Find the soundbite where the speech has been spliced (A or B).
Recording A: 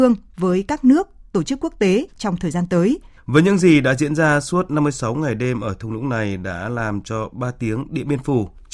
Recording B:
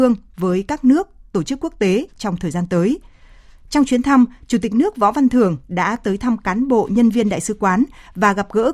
A